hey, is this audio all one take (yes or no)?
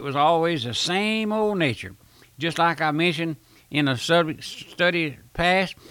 yes